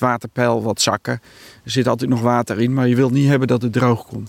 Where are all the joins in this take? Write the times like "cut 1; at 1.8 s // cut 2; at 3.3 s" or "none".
none